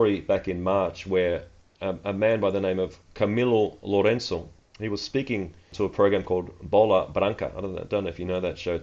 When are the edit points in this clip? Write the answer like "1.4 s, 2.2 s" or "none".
4.6 s